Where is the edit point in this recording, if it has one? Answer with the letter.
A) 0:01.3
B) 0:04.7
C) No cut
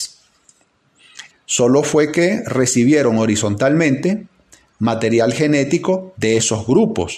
A